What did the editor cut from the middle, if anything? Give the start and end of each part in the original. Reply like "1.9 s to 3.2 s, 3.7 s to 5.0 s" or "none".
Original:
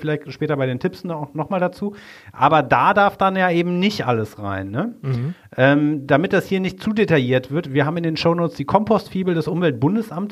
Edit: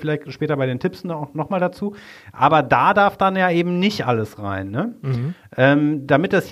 none